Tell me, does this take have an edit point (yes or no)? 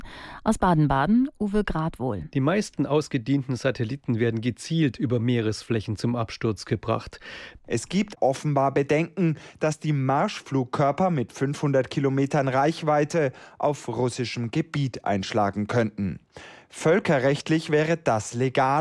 yes